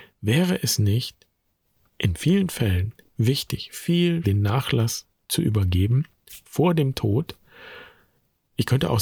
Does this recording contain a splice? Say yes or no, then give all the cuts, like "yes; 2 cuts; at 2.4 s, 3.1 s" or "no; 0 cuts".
yes; 1 cut; at 4.2 s